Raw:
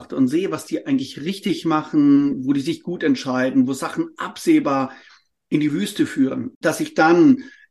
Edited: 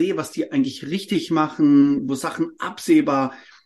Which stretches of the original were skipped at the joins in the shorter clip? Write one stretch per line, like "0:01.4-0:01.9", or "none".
0:02.4-0:03.7